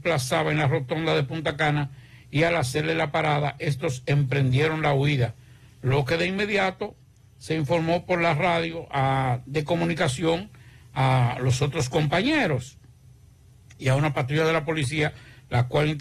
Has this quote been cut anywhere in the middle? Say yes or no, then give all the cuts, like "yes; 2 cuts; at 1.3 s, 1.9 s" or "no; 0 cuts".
no; 0 cuts